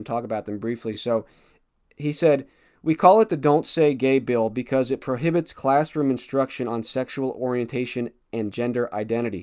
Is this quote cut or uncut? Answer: uncut